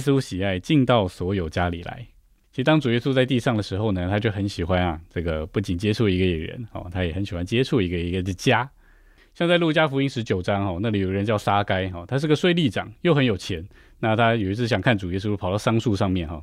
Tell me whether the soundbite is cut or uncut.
uncut